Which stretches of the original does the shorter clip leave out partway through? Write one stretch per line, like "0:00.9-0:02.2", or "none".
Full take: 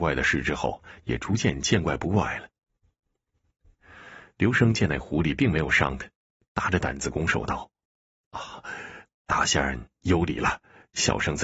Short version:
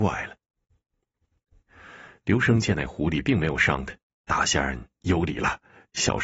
0:06.2-0:09.1